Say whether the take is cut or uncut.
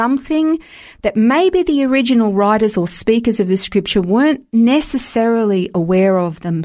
uncut